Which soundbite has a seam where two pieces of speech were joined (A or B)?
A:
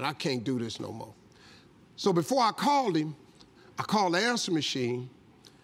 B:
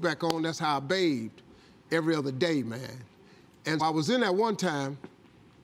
B